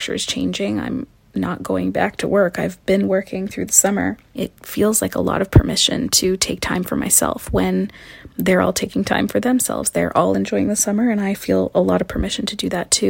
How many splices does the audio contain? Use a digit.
1